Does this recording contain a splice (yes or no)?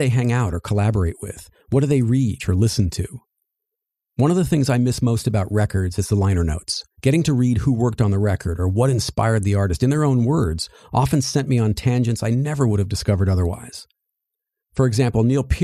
yes